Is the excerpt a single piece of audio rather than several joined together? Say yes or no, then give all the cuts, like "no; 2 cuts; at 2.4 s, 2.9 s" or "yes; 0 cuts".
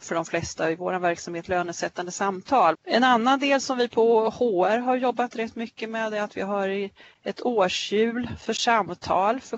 no; 1 cut; at 2.7 s